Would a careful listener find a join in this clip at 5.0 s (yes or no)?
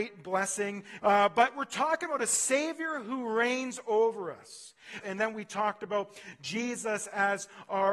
yes